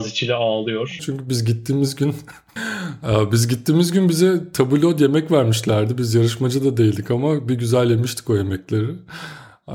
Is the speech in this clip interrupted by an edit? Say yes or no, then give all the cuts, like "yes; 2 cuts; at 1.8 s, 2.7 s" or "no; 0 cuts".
yes; 1 cut; at 1.0 s